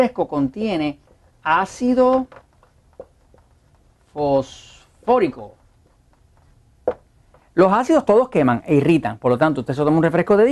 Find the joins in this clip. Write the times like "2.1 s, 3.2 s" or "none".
none